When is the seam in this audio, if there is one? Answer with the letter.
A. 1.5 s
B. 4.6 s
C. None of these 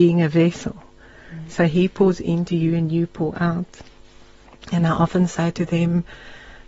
C